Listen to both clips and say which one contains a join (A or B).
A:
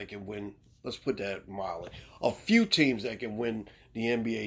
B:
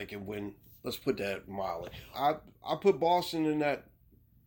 B